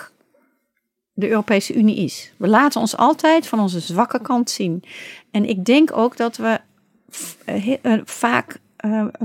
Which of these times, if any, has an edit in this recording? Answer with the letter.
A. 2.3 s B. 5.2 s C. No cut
C